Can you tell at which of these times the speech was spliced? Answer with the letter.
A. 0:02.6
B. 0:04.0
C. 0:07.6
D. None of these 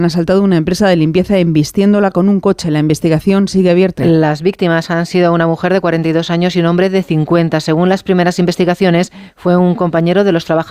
B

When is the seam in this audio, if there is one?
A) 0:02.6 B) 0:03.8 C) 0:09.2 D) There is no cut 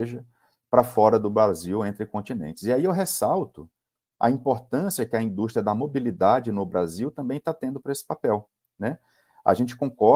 D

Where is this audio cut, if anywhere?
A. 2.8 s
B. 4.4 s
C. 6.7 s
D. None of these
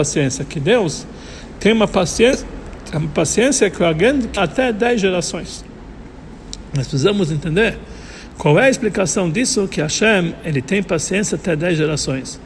B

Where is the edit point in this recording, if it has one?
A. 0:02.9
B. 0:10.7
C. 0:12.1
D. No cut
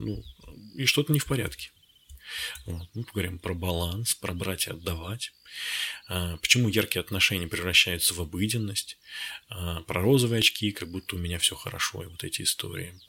A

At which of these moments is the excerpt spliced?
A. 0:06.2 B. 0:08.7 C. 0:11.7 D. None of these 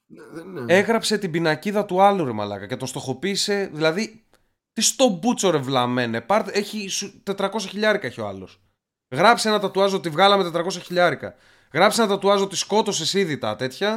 D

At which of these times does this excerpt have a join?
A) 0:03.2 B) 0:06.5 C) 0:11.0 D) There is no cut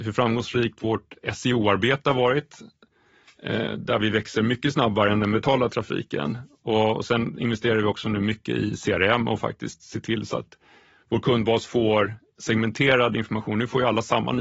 A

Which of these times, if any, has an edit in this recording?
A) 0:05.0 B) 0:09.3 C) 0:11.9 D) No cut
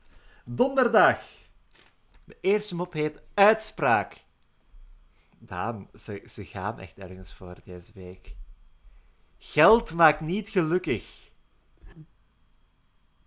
C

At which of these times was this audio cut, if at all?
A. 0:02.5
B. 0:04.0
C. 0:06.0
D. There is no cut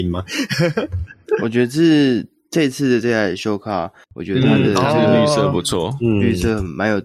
B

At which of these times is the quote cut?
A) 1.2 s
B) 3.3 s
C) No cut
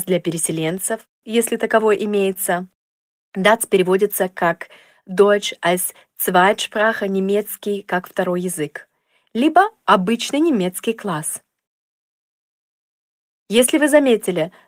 A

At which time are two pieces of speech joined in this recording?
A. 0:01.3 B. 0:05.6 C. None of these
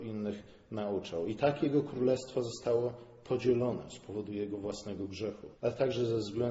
B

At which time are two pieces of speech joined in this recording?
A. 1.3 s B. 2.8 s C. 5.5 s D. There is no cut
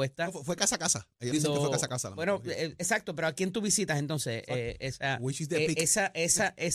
A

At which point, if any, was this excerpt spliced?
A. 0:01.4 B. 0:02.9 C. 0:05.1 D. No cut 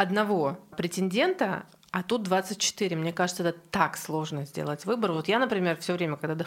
D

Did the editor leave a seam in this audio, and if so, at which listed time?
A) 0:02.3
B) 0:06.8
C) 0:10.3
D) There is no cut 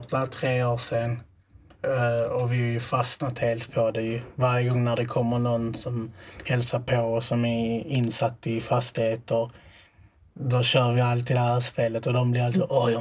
D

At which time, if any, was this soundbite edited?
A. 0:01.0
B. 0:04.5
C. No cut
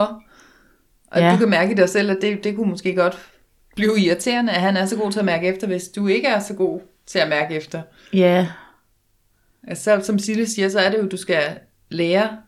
C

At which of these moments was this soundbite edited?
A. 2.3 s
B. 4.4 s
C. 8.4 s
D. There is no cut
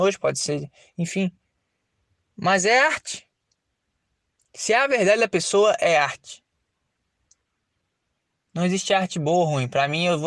B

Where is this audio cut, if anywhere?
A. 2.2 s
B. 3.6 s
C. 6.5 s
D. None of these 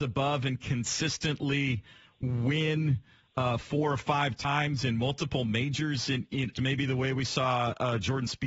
C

